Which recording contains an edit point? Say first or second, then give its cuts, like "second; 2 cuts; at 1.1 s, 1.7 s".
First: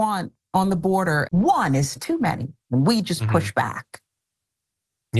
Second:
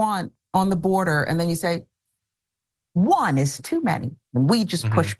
first; 1 cut; at 1.2 s